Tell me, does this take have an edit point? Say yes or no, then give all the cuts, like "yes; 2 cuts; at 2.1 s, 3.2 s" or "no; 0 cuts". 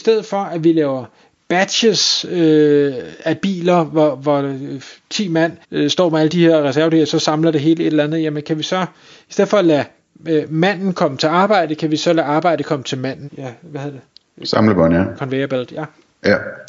yes; 3 cuts; at 5.6 s, 13.3 s, 15.2 s